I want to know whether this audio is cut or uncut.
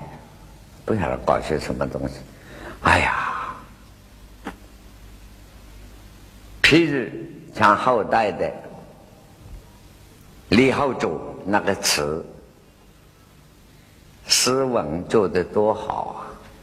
uncut